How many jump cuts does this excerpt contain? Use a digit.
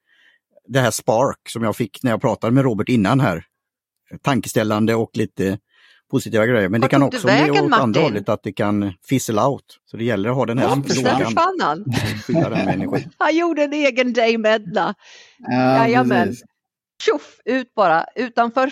2